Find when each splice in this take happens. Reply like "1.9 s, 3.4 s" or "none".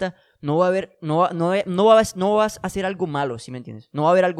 none

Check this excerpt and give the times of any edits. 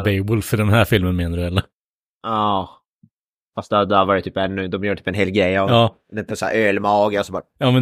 none

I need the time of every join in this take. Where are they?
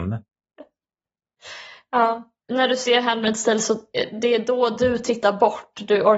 2.5 s

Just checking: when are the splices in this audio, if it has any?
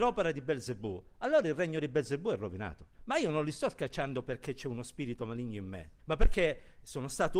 2.9 s, 6.0 s

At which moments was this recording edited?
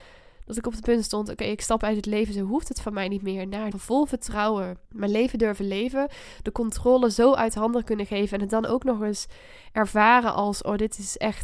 3.7 s, 4.8 s

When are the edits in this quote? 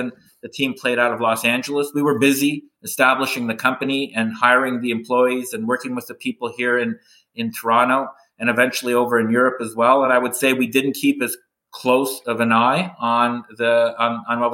none

